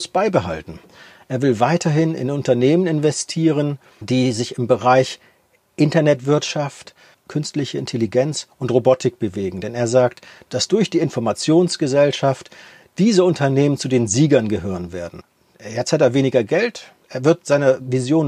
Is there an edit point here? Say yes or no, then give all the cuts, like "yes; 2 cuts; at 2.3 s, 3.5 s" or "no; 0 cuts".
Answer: no; 0 cuts